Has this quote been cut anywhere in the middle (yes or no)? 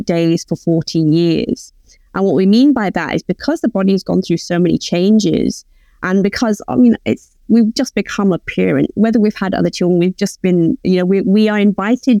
no